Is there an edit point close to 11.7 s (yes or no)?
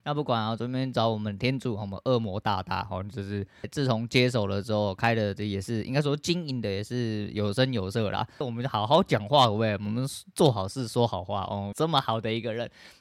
yes